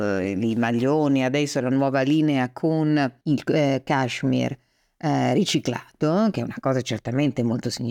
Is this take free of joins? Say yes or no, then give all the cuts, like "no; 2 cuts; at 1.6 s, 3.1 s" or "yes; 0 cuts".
no; 1 cut; at 3.2 s